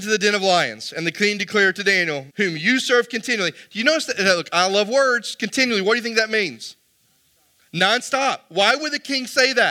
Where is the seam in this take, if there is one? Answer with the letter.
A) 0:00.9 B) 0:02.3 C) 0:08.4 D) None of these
B